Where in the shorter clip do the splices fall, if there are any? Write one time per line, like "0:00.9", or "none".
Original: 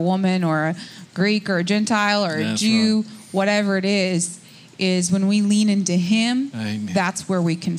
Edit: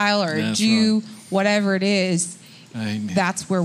0:02.7

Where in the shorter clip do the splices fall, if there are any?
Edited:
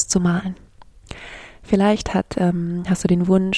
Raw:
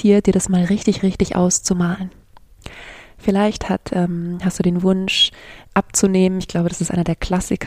none

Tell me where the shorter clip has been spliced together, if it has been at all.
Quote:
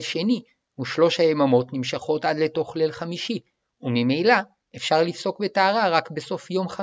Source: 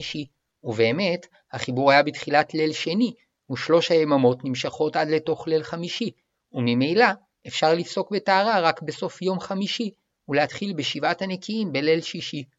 none

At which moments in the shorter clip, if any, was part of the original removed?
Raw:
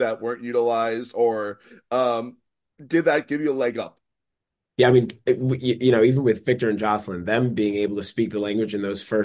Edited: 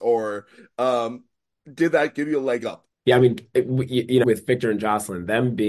0:02.9
0:04.2

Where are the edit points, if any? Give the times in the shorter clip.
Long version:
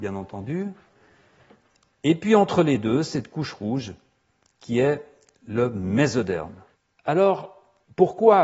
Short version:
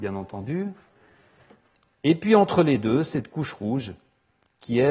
none

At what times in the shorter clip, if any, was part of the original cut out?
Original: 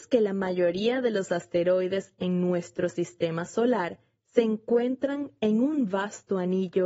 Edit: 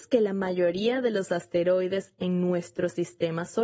none

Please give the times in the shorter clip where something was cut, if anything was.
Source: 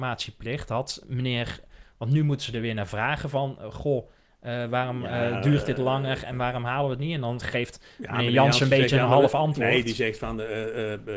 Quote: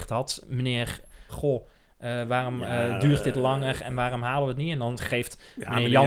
0:01.3

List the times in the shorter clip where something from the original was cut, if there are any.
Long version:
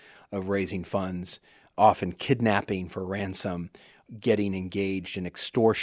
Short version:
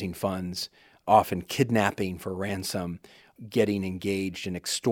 none

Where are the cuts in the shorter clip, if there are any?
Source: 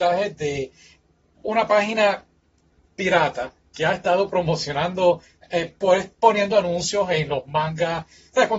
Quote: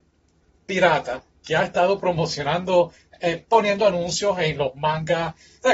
0:03.4

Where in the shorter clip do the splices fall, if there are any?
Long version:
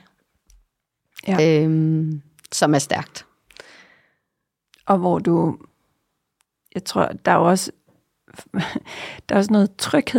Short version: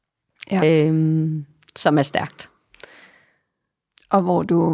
none

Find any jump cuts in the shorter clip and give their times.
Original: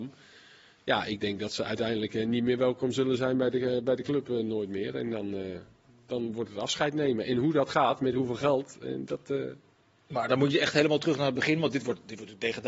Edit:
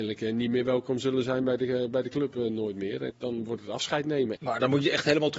0:03.1
0:04.4

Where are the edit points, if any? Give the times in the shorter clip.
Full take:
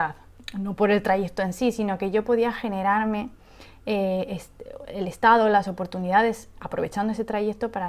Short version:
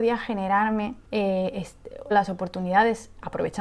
0:01.0
0:02.1

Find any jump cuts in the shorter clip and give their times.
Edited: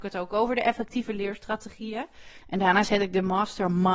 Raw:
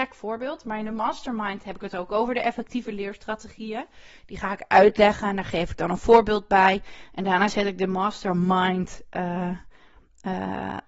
0:02.4

